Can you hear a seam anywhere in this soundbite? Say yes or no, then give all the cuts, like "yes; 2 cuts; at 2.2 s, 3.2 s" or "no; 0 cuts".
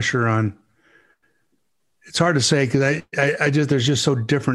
no; 0 cuts